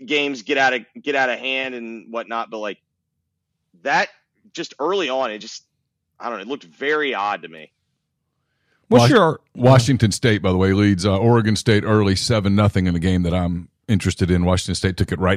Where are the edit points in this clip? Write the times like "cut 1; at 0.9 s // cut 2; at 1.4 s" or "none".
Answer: none